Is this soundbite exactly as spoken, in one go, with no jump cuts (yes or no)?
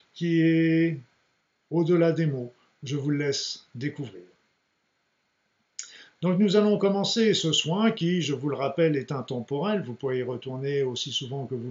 yes